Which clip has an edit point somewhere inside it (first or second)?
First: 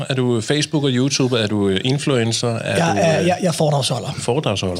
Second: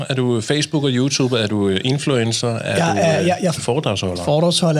second